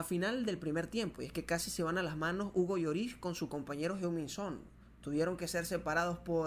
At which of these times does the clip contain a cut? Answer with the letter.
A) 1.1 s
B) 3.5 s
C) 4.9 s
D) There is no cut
D